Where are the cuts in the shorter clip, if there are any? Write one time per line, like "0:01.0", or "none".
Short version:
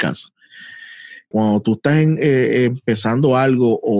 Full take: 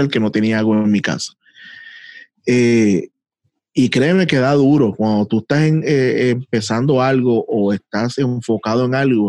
0:01.3